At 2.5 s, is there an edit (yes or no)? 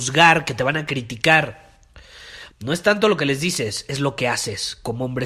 yes